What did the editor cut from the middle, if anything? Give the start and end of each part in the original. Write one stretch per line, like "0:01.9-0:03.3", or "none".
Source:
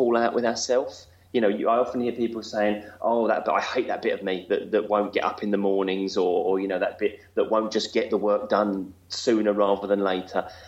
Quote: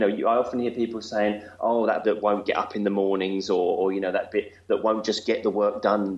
0:03.4-0:04.7